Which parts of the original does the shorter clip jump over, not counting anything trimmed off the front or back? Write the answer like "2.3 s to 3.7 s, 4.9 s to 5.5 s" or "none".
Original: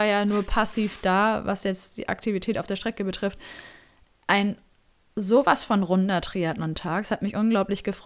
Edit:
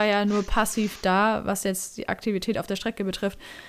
none